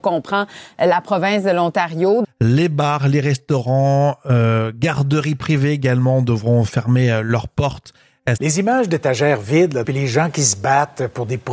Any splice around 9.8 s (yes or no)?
yes